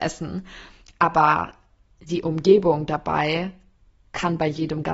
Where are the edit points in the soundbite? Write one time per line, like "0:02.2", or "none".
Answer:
none

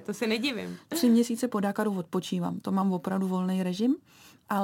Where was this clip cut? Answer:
none

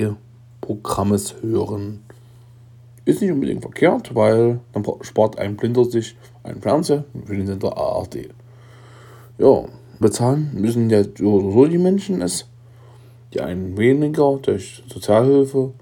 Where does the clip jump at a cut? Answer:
0:10.0

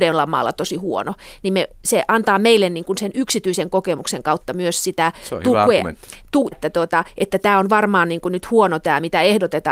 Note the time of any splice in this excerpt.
0:06.5

